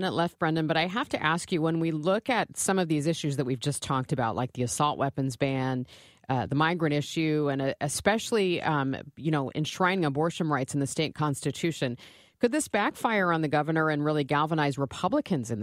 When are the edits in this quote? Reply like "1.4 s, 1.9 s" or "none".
none